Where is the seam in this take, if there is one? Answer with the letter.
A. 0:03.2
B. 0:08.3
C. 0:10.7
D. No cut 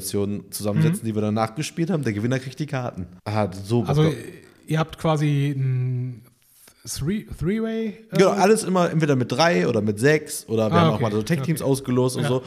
A